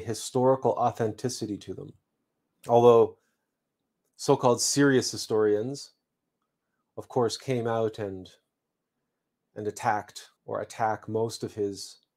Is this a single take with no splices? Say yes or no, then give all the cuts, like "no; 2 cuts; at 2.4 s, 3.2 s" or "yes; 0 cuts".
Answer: no; 2 cuts; at 2.5 s, 10.4 s